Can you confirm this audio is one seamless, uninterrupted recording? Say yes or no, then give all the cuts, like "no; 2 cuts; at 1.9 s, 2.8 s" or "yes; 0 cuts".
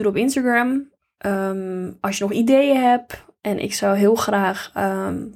yes; 0 cuts